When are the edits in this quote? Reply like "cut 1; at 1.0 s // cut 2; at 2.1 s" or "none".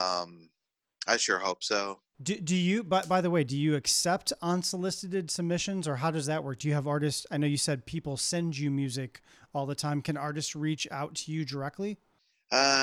cut 1; at 2.1 s